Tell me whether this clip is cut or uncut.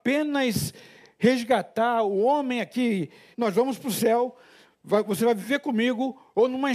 cut